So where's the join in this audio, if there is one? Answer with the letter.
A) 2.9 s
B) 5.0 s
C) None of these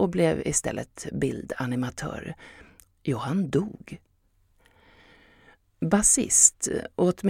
A